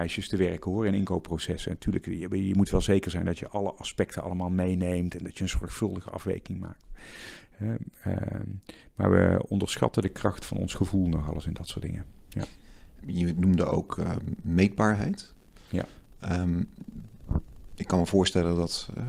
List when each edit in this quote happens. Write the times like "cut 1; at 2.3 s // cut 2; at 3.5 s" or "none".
cut 1; at 13.0 s